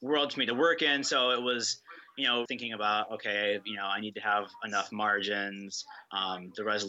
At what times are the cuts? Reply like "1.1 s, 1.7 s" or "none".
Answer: 2.5 s